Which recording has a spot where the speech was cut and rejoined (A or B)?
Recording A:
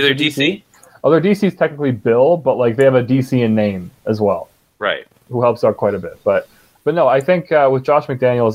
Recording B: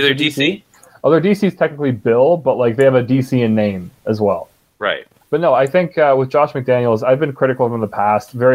B